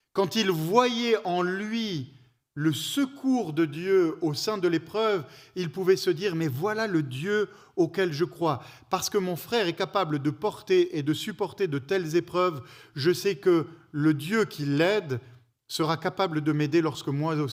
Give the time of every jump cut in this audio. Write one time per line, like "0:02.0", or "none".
none